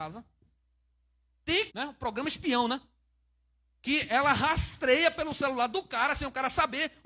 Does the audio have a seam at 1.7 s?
yes; 1 cut; at 1.7 s

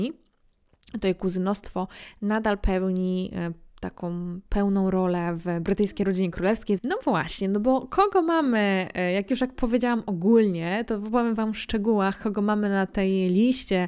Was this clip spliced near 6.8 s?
yes; 1 cut; at 6.8 s

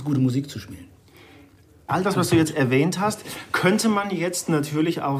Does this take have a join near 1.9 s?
yes; 1 cut; at 1.9 s

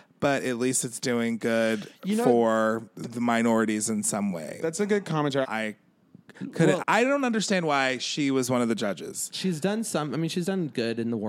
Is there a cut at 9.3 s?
no; 2 cuts; at 5.4 s, 6.8 s

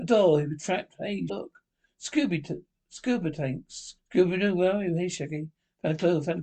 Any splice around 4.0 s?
yes; 2 cuts; at 1.3 s, 4.0 s

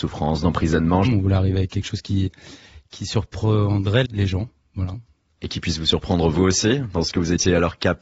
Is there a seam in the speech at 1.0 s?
yes; 2 cuts; at 1.0 s, 4.0 s

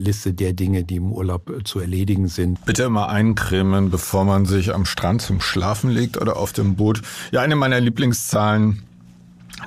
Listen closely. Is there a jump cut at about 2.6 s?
yes; 1 cut; at 2.6 s

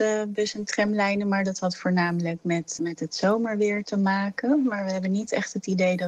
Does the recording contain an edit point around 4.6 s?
no; 1 cut; at 2.8 s

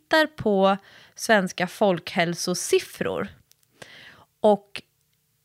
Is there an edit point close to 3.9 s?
no; 0 cuts

